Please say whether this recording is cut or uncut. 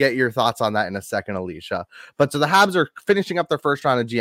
uncut